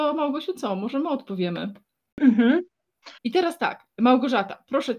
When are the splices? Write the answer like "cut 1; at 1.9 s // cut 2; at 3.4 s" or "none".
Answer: cut 1; at 3.2 s

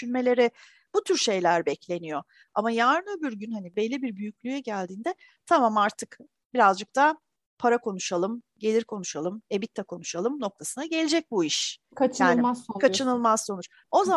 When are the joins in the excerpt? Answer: cut 1; at 9.4 s

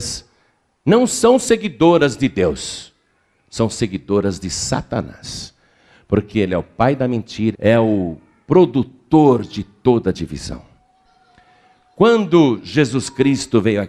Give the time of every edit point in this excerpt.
cut 1; at 7.5 s

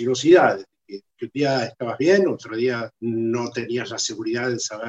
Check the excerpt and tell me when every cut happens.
cut 1; at 2.9 s

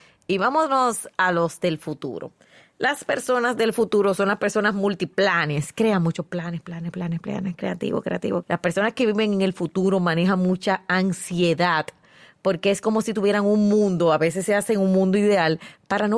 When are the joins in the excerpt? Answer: cut 1; at 8.4 s

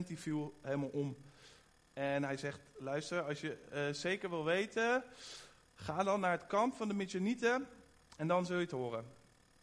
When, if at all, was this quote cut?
cut 1; at 1.9 s

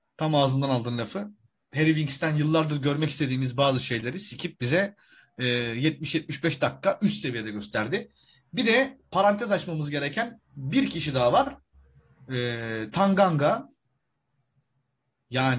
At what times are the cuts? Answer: none

